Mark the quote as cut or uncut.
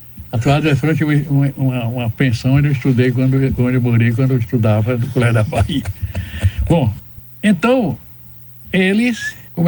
uncut